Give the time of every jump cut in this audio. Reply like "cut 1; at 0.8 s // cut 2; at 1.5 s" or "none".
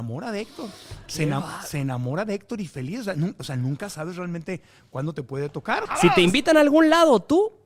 cut 1; at 5.9 s